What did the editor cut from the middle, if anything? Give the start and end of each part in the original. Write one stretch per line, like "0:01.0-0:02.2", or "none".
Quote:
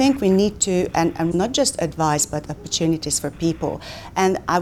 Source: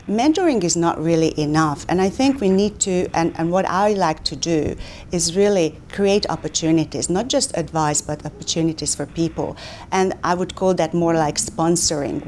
0:03.5-0:07.1